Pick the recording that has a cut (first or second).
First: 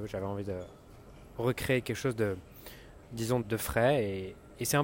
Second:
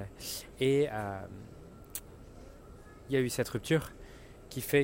first